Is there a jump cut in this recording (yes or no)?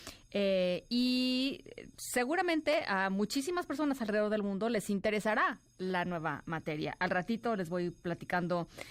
no